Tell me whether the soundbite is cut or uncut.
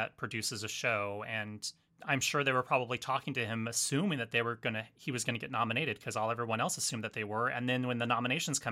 uncut